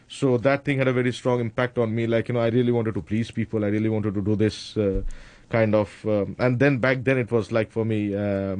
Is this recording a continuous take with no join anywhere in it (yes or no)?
yes